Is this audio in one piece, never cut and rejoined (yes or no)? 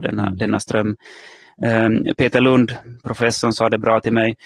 yes